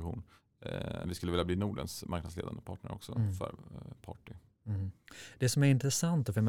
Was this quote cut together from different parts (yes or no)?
yes